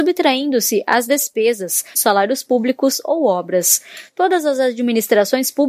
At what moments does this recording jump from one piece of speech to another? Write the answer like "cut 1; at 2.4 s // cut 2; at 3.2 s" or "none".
cut 1; at 1.9 s